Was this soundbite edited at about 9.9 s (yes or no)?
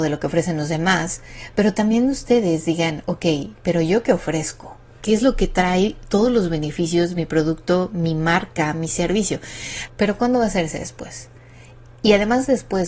yes